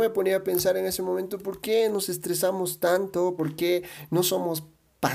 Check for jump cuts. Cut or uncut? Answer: uncut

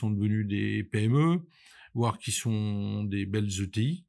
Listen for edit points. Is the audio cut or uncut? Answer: uncut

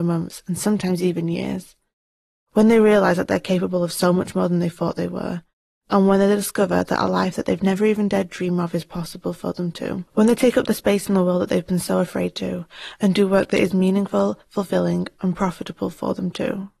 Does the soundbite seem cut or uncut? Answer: cut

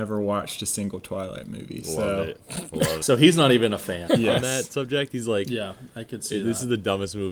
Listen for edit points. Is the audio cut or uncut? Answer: cut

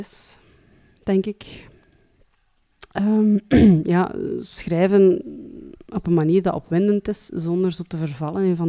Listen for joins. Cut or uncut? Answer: uncut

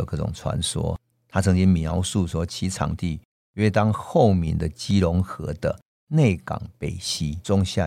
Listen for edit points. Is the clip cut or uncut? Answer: cut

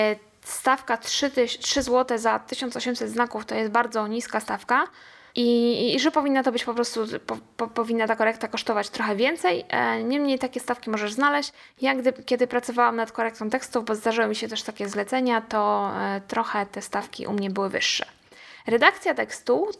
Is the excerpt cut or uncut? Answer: uncut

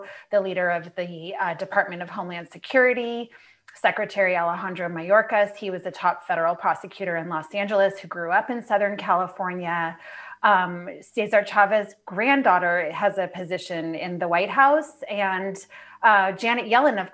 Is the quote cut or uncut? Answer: uncut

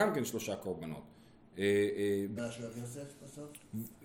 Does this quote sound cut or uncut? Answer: cut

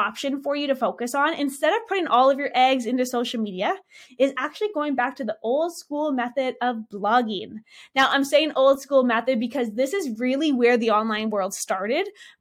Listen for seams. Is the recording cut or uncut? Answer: uncut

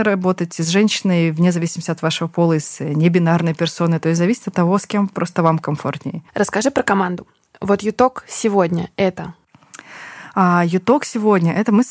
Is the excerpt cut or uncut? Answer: cut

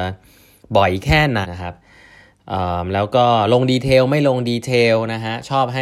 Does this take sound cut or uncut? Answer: cut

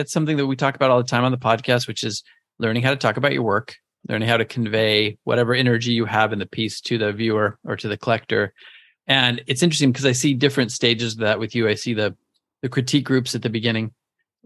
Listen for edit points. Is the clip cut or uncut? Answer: uncut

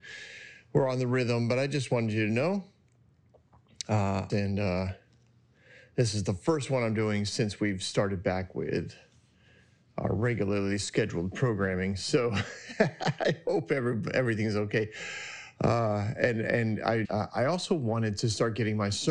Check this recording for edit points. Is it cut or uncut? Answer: cut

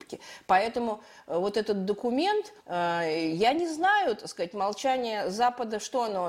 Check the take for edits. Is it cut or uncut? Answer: cut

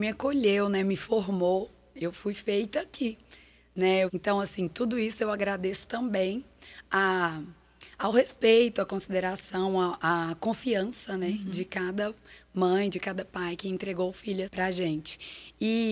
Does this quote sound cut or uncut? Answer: cut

